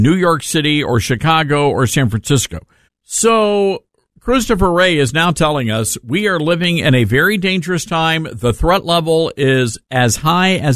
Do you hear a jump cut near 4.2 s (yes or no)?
no